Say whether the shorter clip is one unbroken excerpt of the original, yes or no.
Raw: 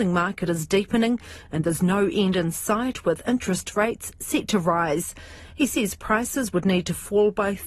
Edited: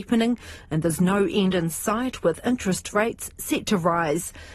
yes